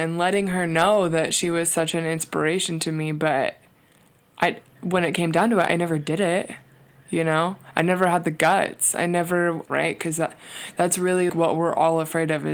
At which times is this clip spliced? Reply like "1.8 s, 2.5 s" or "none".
9.7 s, 11.3 s